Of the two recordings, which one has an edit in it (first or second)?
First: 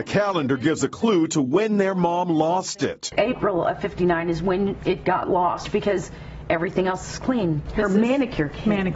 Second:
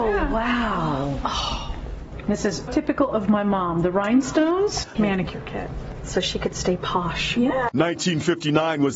second